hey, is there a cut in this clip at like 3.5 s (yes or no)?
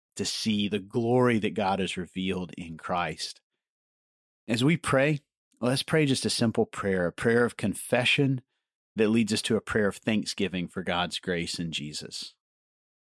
no